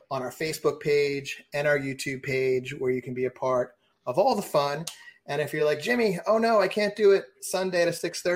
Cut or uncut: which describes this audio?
uncut